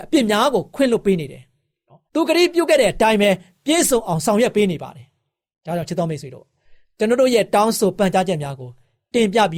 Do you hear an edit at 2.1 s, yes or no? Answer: yes